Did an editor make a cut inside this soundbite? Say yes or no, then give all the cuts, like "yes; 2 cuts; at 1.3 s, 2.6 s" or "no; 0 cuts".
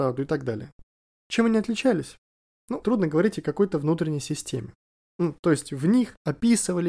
yes; 2 cuts; at 2.8 s, 5.0 s